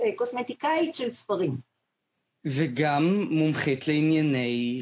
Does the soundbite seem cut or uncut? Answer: uncut